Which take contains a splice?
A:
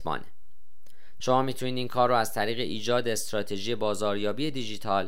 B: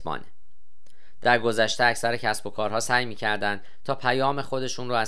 A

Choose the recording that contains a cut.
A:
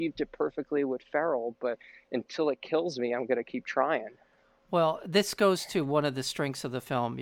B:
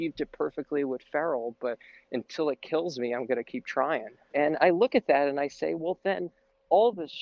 B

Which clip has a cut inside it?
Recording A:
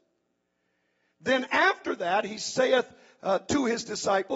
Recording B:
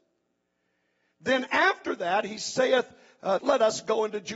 B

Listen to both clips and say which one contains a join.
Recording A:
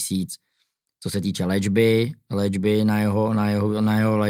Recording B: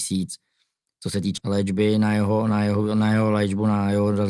B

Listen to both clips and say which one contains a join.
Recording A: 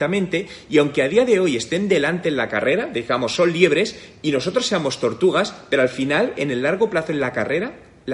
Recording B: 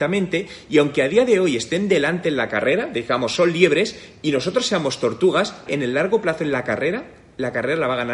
B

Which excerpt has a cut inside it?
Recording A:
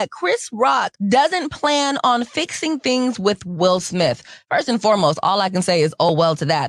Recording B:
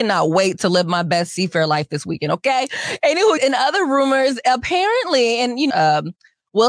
B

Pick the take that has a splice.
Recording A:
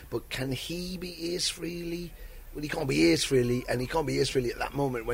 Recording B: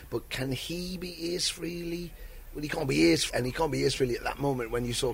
B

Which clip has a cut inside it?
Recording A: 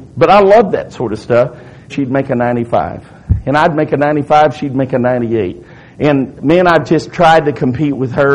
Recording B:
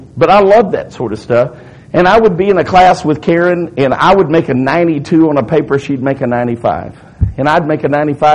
A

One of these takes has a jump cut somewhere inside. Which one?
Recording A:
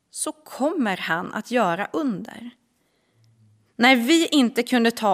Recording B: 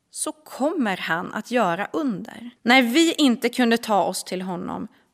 B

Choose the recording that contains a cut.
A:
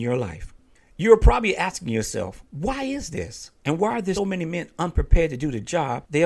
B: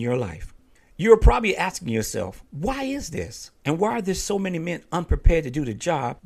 A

